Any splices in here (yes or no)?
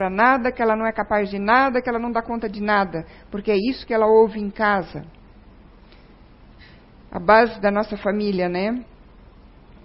no